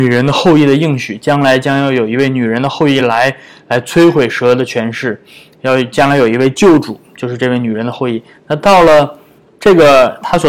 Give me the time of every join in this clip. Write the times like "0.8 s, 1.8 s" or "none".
none